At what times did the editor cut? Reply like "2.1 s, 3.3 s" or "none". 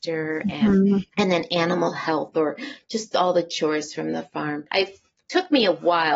4.7 s